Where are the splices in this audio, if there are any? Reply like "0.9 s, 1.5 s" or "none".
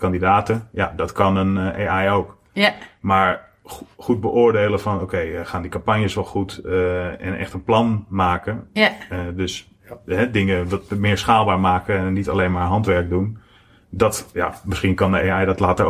none